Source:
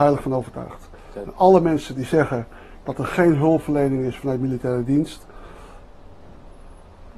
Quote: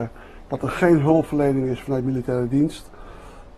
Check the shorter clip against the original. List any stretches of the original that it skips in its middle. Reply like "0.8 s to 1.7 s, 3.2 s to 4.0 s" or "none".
none